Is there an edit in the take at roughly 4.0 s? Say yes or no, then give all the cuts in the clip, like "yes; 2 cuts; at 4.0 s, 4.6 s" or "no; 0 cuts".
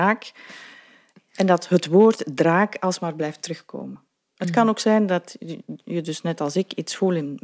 no; 0 cuts